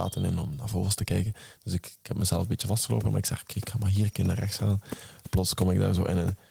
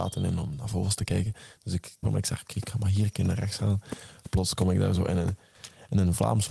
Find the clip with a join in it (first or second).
second